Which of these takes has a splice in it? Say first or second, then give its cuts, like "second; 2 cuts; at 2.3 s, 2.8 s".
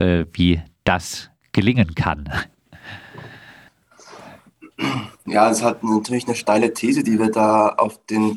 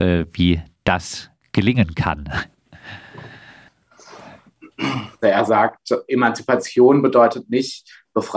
second; 1 cut; at 5.2 s